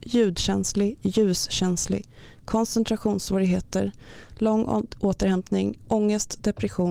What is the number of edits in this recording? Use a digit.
0